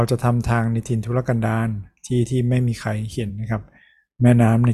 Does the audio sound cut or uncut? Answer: uncut